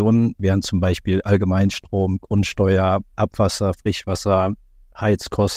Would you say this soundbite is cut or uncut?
uncut